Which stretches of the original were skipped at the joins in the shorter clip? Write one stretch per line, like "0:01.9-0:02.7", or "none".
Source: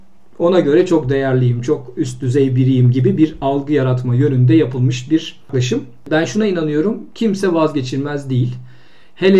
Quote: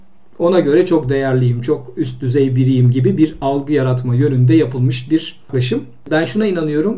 none